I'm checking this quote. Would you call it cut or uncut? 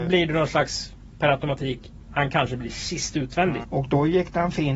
cut